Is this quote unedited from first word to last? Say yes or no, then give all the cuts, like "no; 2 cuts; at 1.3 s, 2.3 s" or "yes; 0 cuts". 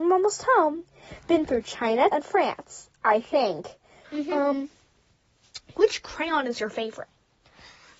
no; 2 cuts; at 2.1 s, 4.0 s